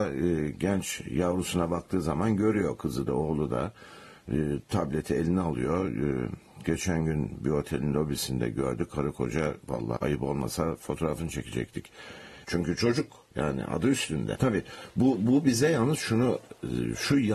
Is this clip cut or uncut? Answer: cut